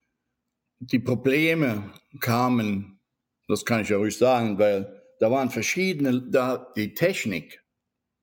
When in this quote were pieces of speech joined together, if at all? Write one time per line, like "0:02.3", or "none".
0:03.4